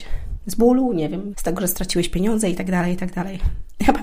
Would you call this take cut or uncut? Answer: cut